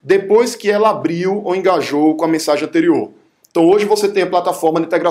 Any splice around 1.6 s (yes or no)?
no